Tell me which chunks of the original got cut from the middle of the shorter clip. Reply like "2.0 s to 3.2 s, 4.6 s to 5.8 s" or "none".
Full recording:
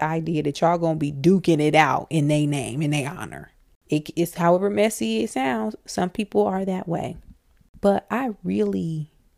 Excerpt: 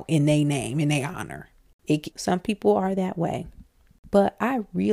4.1 s to 5.8 s